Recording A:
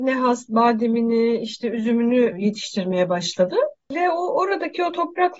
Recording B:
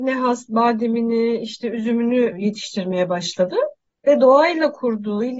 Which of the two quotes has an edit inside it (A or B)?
B